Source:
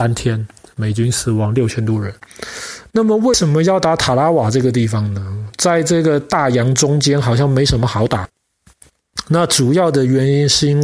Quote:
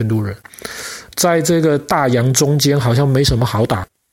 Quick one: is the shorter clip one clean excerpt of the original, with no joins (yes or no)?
no